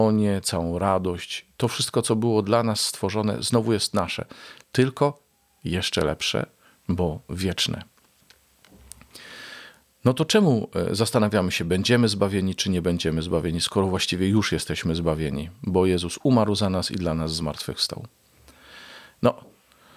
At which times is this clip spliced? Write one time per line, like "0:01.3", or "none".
none